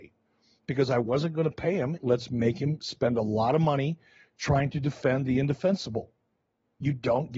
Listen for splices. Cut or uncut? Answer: cut